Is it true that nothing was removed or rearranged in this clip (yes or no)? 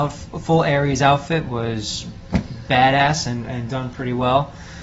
yes